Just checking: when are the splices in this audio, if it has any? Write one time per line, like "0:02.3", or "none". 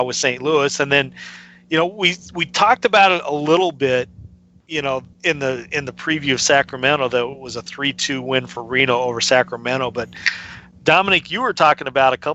0:05.1